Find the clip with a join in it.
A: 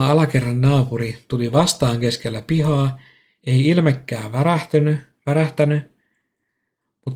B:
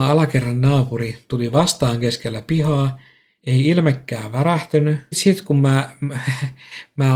B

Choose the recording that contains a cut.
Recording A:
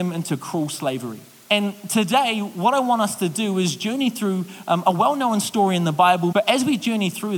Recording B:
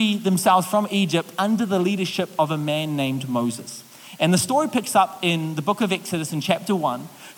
A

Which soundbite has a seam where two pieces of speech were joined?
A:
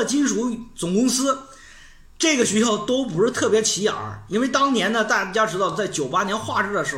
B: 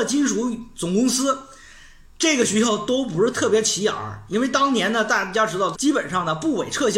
B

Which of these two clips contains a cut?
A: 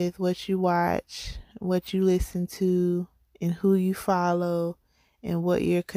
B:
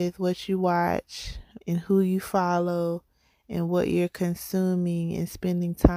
B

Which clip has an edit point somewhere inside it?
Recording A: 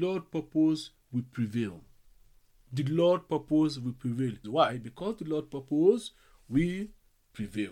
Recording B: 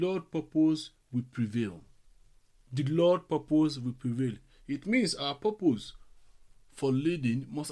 A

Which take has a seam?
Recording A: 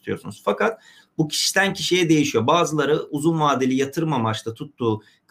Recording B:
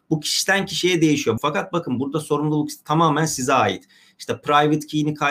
B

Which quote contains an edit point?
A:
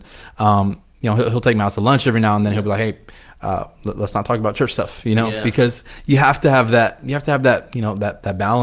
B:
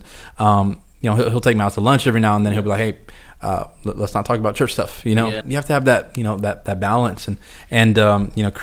B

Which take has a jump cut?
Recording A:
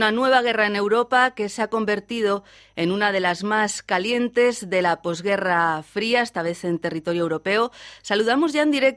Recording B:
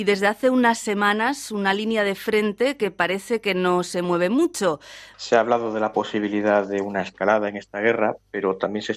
B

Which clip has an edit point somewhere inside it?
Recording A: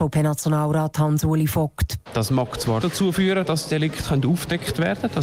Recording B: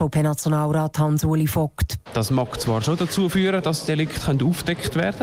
A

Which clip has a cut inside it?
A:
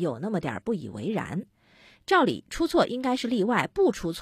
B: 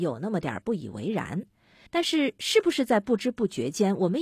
B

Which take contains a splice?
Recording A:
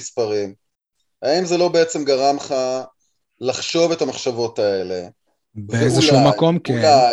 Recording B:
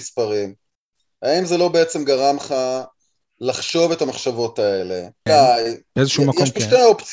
B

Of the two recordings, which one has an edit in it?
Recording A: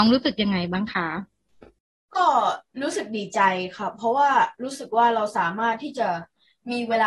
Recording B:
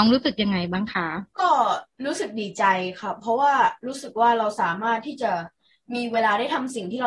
B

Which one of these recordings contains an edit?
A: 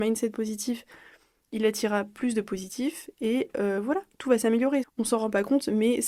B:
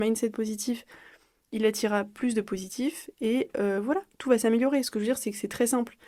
A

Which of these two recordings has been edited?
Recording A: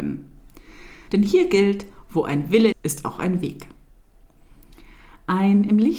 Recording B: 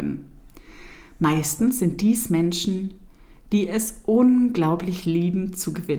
A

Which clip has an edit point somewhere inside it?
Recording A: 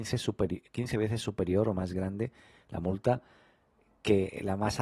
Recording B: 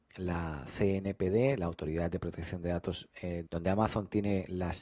B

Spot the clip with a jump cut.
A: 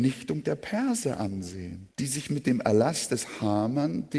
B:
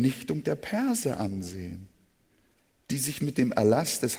A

